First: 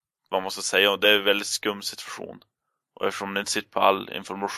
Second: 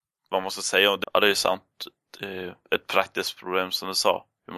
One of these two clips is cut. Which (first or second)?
second